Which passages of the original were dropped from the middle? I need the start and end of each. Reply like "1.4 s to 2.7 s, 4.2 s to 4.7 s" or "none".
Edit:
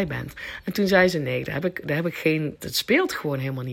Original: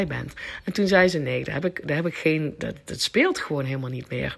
2.6 s to 2.8 s